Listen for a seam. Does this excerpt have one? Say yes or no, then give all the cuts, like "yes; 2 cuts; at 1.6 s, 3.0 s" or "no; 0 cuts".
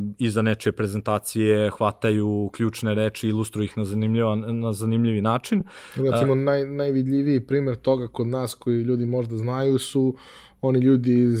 no; 0 cuts